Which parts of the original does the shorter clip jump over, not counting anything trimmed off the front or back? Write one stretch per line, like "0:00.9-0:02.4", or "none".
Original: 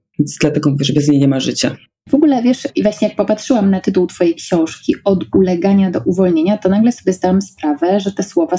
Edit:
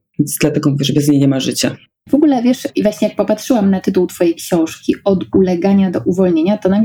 none